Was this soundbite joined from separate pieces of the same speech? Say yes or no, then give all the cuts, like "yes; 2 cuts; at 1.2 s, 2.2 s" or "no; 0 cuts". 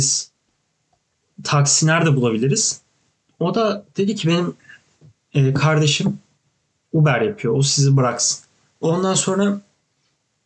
yes; 1 cut; at 8.6 s